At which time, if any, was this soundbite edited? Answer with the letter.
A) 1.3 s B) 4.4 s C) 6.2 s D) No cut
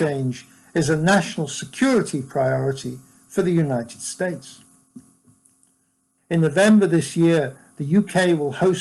C